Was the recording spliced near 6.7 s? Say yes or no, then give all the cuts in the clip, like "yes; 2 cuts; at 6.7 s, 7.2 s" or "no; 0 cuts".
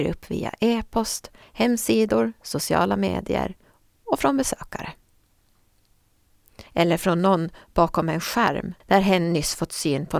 yes; 3 cuts; at 1.4 s, 6.7 s, 8.8 s